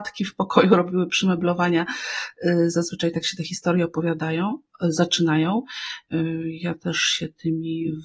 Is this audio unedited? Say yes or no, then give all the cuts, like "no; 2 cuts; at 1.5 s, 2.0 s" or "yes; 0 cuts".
no; 1 cut; at 6.1 s